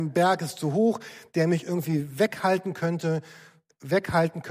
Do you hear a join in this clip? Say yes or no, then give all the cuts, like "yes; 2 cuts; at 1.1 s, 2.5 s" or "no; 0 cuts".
no; 0 cuts